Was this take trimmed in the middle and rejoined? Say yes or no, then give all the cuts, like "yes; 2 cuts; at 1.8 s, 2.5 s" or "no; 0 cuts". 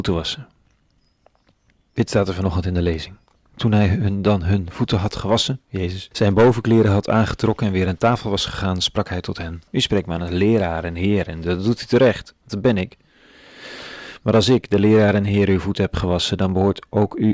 yes; 2 cuts; at 6.1 s, 9.7 s